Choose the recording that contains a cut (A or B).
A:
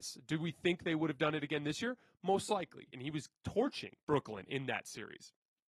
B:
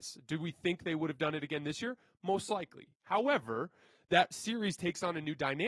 A